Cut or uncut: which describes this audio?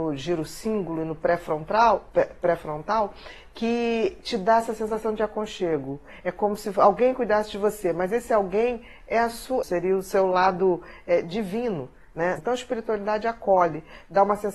cut